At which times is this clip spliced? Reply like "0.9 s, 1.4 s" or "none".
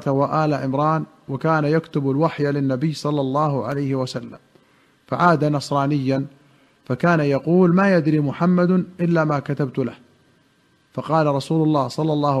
none